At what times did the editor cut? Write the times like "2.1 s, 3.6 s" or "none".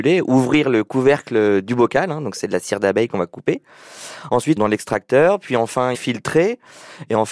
4.6 s, 5.9 s

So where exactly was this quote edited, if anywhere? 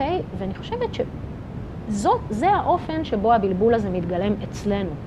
none

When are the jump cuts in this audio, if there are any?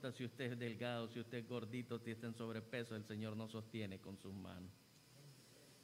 none

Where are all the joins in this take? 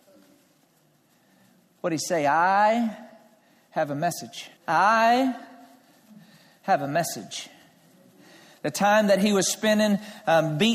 4.6 s

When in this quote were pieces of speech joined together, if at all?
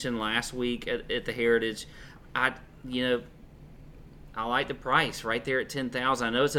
none

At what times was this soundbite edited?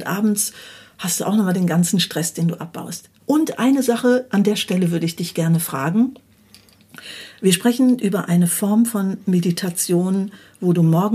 3.2 s

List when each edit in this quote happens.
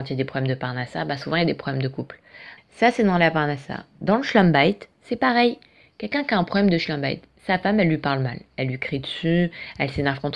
2.6 s

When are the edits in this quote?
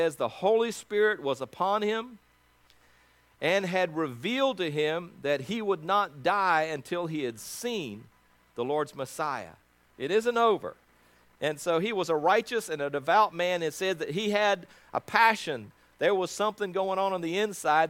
9.9 s

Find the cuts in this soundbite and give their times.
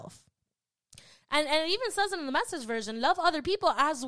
none

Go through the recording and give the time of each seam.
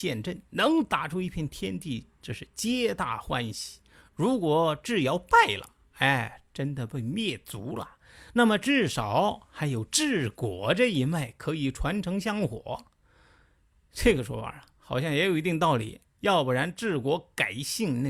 none

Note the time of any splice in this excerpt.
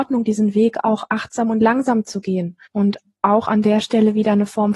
2.7 s

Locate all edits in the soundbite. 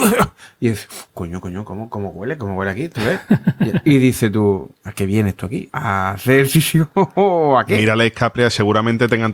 none

